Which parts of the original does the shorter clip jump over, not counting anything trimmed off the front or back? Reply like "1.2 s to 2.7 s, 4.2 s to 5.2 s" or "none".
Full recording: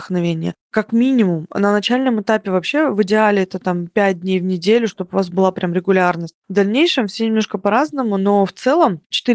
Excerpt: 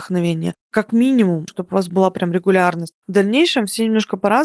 1.5 s to 4.9 s